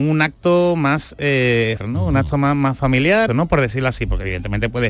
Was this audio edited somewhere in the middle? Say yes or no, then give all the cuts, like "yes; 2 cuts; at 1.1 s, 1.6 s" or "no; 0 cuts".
yes; 2 cuts; at 1.8 s, 3.3 s